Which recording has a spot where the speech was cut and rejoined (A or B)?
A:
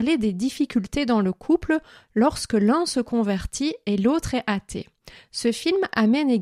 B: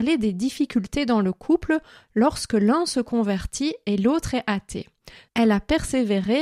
B